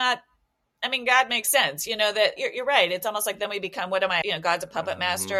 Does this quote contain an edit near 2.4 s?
yes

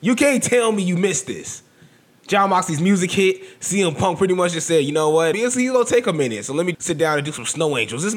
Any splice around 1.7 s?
no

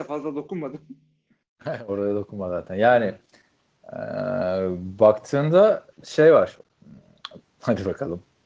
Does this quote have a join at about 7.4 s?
yes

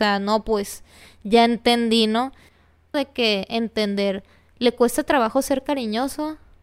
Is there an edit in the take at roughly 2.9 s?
yes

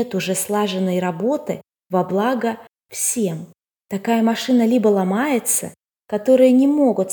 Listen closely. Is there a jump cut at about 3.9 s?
no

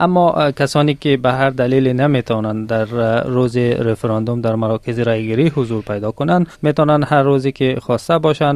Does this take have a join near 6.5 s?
yes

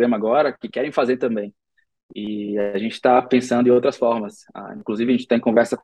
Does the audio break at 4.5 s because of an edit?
no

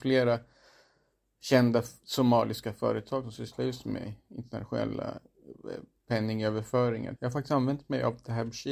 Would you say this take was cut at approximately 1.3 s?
no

